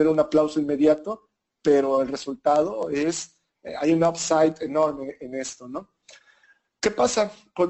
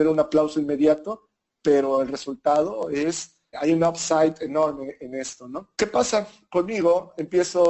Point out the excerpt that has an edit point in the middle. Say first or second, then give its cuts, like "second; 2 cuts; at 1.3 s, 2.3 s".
second; 2 cuts; at 3.5 s, 5.7 s